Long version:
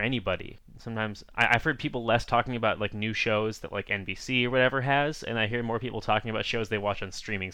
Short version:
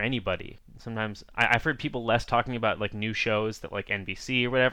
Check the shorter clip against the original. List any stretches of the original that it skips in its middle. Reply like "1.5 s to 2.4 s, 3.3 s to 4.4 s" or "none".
none